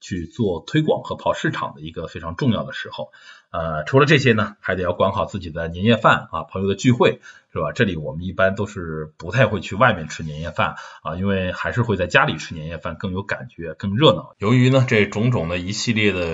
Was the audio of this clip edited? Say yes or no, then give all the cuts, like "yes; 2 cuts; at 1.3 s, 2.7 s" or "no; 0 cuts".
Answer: yes; 1 cut; at 14.3 s